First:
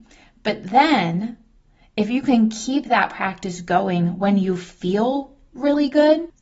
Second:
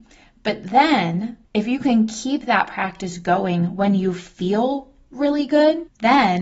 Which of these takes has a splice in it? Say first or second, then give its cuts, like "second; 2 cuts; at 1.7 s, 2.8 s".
second; 1 cut; at 1.4 s